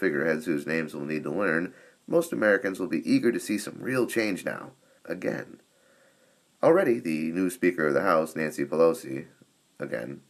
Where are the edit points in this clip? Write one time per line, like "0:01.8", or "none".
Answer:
0:05.0